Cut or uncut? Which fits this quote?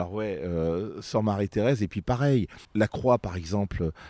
cut